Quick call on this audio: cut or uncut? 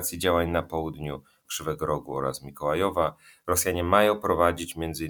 cut